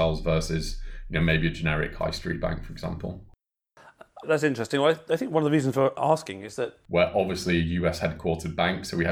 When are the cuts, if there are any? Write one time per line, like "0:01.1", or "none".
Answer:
0:04.2
0:06.8